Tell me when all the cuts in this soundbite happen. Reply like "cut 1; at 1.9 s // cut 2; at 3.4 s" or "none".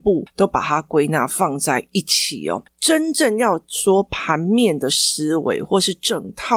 cut 1; at 2.7 s